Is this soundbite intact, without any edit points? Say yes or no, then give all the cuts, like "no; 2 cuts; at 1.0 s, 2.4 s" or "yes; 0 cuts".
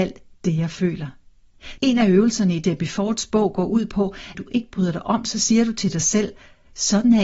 no; 2 cuts; at 1.8 s, 4.3 s